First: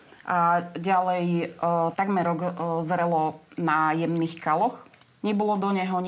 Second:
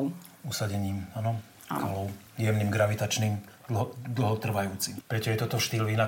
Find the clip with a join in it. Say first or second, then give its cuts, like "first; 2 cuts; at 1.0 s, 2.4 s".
second; 2 cuts; at 2.3 s, 5.0 s